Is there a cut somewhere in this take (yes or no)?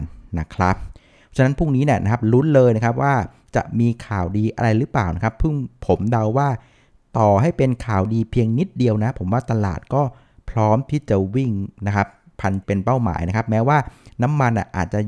yes